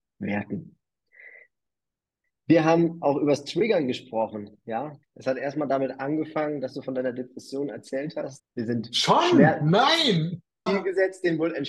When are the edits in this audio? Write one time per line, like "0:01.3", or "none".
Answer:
0:05.0
0:08.4
0:10.7